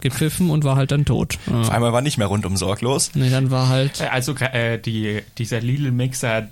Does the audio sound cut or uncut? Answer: uncut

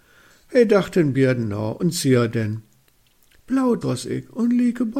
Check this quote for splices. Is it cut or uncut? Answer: cut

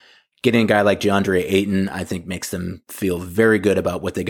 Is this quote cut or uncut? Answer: uncut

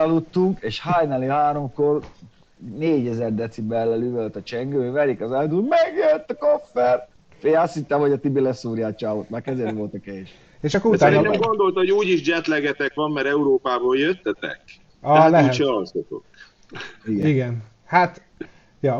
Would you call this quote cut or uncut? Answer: uncut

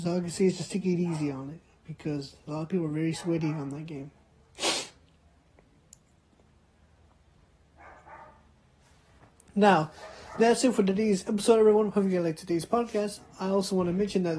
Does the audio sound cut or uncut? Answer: uncut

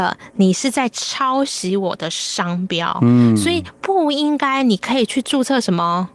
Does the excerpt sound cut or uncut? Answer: uncut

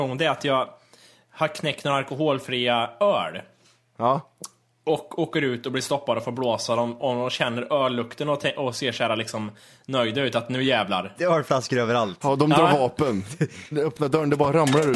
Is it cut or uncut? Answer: uncut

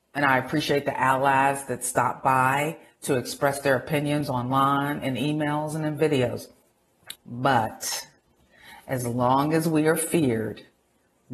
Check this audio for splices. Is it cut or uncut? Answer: cut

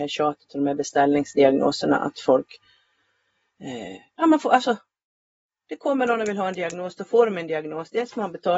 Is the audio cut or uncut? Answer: uncut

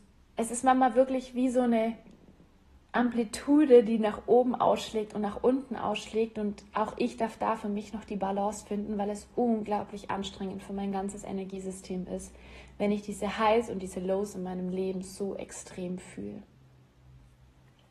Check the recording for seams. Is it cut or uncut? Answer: uncut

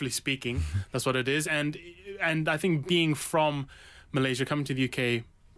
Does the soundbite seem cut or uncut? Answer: uncut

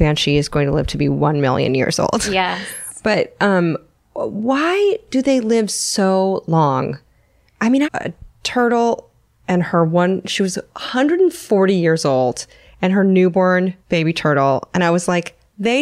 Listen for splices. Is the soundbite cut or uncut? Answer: cut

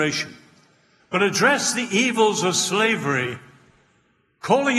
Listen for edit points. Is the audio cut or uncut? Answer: cut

